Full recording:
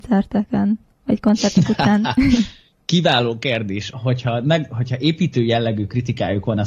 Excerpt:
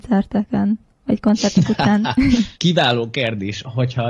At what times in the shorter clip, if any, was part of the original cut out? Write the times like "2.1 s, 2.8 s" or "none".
2.6 s